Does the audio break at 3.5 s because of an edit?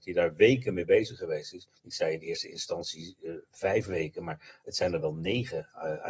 no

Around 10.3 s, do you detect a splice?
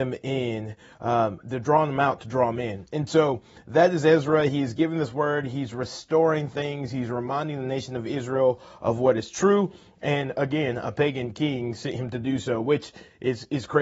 yes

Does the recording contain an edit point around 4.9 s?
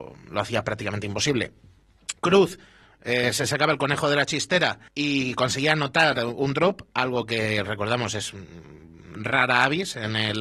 yes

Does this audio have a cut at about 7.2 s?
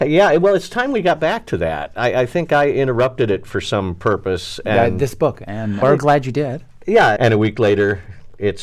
yes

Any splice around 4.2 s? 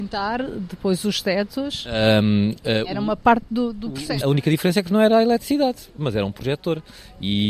yes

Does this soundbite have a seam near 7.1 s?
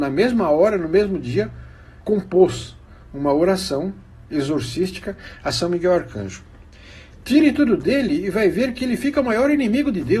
yes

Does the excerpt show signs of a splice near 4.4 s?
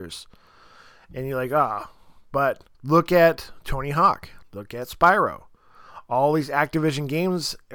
yes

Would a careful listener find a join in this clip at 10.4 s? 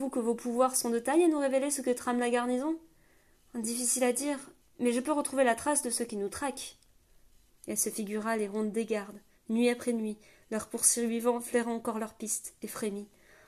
no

